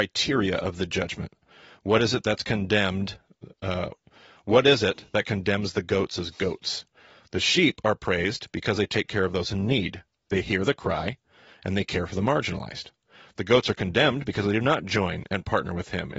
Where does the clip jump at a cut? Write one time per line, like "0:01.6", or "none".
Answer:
none